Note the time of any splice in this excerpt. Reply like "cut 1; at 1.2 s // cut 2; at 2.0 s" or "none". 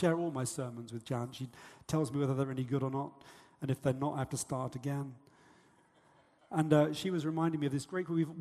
none